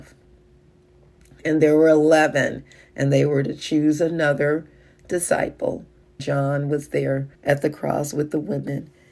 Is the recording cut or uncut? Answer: cut